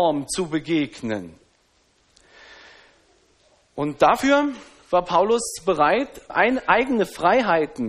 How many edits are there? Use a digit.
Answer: 1